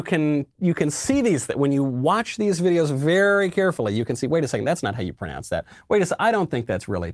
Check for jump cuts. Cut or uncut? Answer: uncut